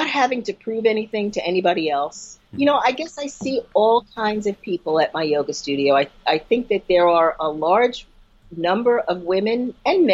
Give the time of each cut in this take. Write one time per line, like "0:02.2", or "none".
0:02.5